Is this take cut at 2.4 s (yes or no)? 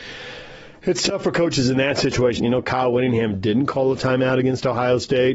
yes